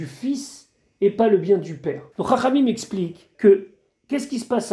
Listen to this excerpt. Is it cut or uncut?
cut